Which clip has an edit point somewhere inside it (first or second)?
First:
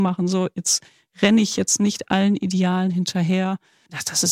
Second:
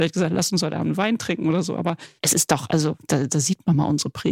second